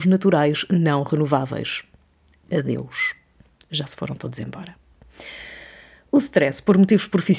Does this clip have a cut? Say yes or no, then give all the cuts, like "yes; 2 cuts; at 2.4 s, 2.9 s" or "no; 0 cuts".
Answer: no; 0 cuts